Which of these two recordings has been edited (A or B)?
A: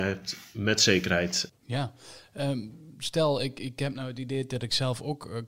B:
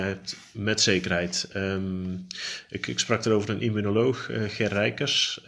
A